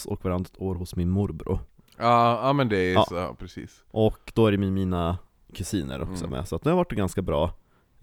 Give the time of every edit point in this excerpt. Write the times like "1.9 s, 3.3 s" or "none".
none